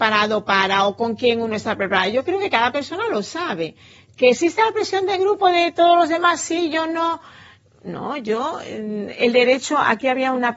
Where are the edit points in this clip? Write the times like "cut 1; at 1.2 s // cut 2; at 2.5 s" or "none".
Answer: none